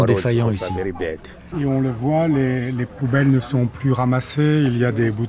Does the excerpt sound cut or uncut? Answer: cut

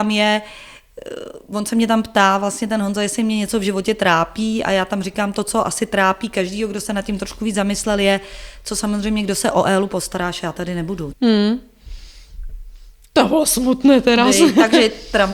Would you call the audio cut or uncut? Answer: cut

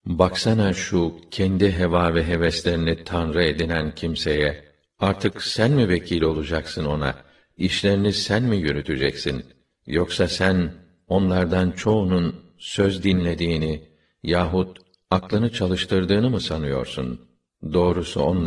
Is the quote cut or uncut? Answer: uncut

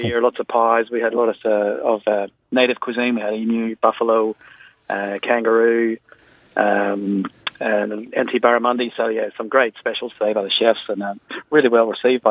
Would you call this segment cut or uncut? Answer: uncut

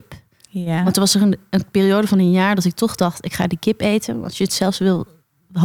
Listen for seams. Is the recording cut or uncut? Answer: uncut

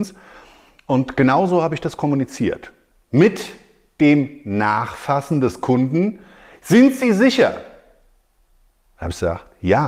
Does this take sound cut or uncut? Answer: uncut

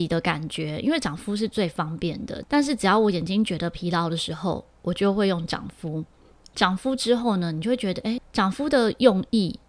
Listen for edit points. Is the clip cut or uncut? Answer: cut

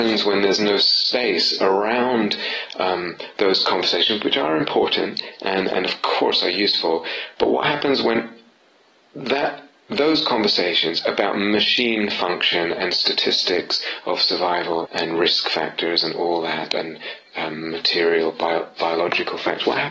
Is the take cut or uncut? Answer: cut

